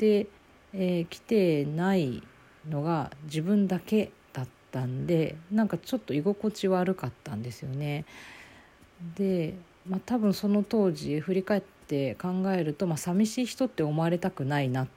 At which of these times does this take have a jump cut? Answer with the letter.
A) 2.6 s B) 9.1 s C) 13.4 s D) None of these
D